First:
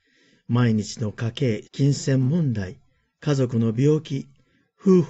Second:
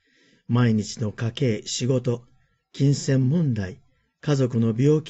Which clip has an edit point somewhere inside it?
first; 1 cut; at 1.6 s

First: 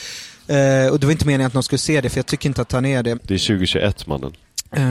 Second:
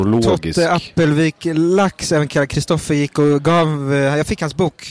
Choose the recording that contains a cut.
first; 1 cut; at 3.1 s

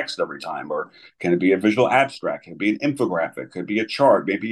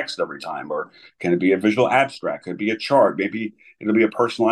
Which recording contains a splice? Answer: second; 1 cut; at 2.4 s

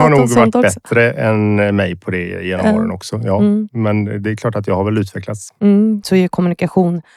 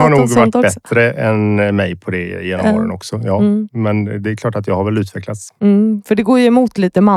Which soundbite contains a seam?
first; 1 cut; at 6.0 s

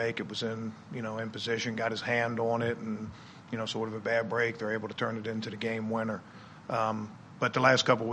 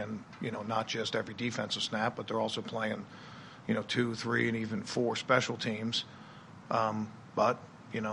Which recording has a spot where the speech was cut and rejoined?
second; 1 cut; at 6.6 s

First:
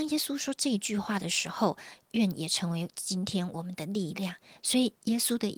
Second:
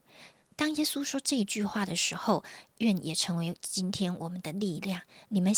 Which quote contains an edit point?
first; 1 cut; at 4.6 s

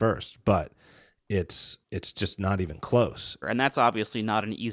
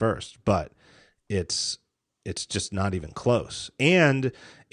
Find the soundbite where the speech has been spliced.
first; 2 cuts; at 1.8 s, 3.4 s

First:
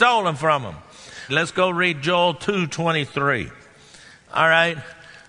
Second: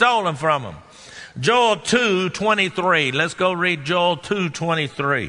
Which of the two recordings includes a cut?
first; 1 cut; at 1.3 s

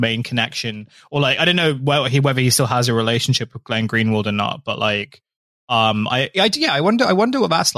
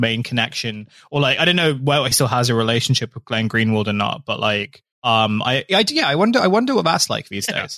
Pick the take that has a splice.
second; 2 cuts; at 2.1 s, 4.9 s

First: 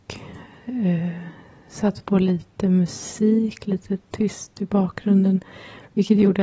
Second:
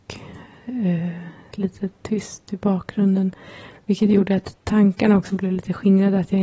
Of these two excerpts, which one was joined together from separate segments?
second; 1 cut; at 1.5 s

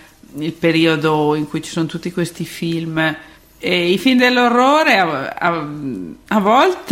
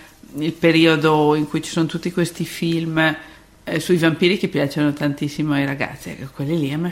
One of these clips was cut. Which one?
first; 1 cut; at 3.4 s

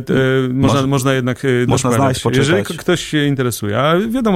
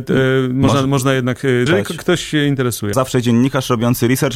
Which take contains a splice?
second; 2 cuts; at 1.7 s, 2.9 s

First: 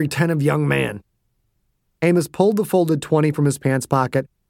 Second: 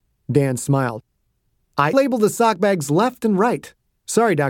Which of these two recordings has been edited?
second; 1 cut; at 1.9 s

